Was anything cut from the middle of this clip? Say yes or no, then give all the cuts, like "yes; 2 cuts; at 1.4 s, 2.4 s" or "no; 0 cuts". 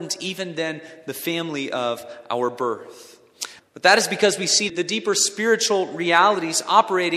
yes; 2 cuts; at 3.6 s, 4.7 s